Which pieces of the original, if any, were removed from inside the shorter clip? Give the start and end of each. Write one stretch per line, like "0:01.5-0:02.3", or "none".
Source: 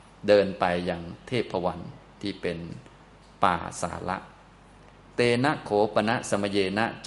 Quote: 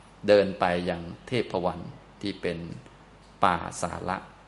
none